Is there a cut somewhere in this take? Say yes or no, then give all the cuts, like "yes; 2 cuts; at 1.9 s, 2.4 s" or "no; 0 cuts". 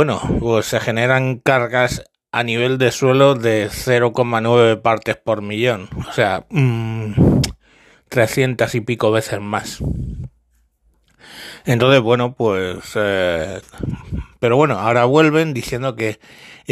yes; 1 cut; at 6.0 s